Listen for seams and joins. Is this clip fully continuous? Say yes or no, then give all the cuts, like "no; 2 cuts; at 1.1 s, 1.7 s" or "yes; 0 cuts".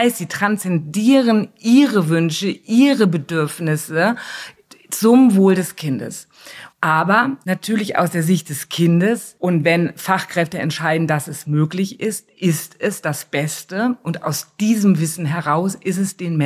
no; 1 cut; at 6.7 s